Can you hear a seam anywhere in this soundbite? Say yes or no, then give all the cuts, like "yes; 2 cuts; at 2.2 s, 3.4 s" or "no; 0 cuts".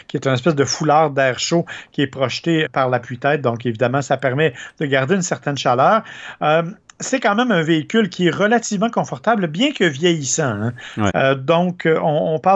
yes; 2 cuts; at 2.6 s, 11.1 s